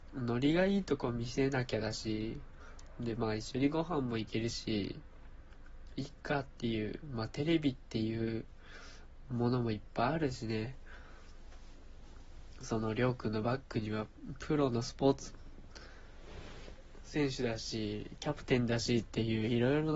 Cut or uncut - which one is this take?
uncut